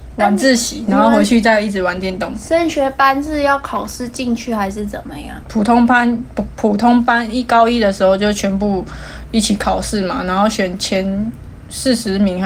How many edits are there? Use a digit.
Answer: 1